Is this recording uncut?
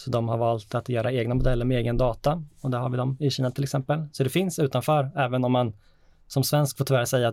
yes; 0 cuts

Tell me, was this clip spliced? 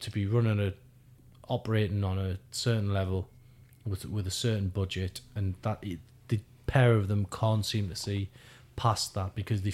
no; 0 cuts

